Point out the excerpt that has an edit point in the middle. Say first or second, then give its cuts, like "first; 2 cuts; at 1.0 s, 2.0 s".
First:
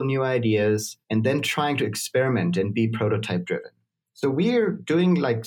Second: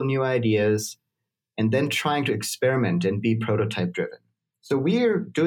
first; 1 cut; at 1.0 s